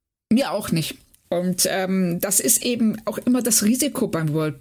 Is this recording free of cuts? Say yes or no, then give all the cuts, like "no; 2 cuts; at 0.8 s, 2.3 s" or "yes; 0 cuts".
no; 1 cut; at 1.2 s